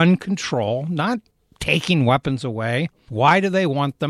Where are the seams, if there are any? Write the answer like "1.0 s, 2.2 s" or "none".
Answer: 3.1 s